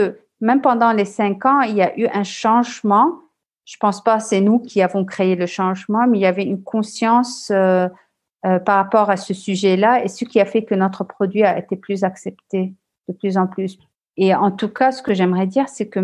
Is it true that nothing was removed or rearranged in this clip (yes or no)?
yes